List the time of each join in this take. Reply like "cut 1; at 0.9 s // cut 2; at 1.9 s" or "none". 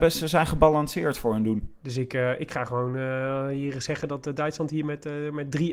cut 1; at 1.8 s